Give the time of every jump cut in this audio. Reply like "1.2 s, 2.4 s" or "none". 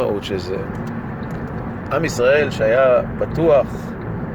none